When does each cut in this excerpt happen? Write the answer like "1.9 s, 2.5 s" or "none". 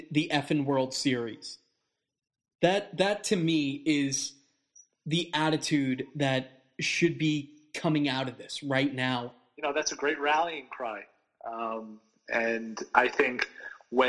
none